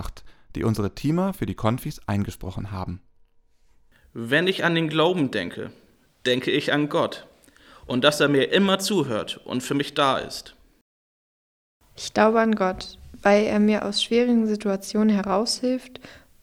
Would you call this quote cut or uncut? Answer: uncut